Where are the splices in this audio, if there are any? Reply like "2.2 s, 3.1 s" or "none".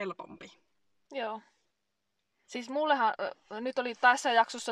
2.4 s